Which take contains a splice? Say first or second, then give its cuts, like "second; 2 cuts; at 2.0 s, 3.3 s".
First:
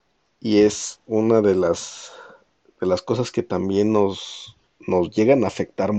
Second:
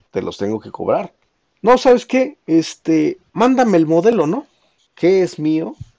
second; 1 cut; at 4.8 s